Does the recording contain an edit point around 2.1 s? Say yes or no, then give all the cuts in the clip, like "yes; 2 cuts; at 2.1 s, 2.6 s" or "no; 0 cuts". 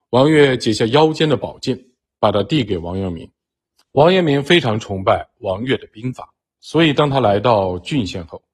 no; 1 cut; at 3.8 s